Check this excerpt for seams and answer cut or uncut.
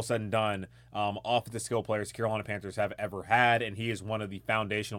uncut